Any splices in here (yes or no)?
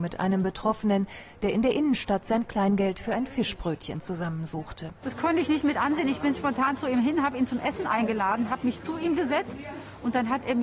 no